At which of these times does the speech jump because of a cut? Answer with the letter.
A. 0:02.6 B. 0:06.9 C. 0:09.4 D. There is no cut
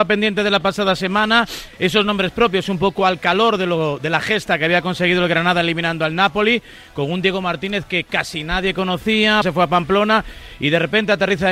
C